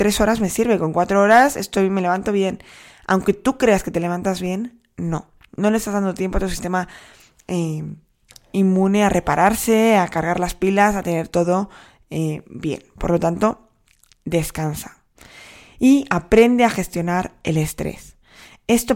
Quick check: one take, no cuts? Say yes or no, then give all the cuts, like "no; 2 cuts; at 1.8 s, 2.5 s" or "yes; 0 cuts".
yes; 0 cuts